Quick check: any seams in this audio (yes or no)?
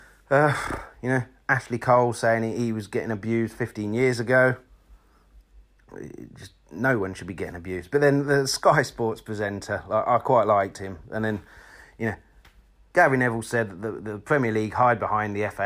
yes